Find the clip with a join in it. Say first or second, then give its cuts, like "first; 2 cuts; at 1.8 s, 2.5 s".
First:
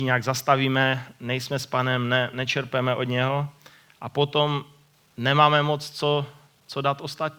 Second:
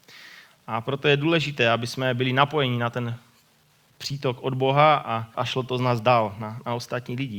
second; 1 cut; at 5.3 s